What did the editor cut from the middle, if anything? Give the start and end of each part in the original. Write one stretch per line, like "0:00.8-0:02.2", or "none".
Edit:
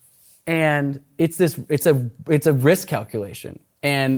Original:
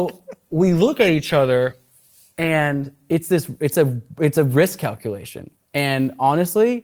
none